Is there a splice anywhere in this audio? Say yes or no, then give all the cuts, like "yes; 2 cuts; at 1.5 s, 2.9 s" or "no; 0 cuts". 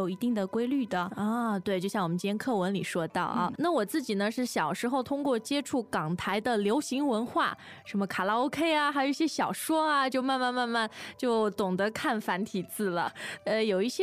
yes; 1 cut; at 3.6 s